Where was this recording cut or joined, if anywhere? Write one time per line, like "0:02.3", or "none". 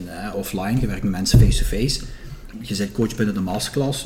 0:02.5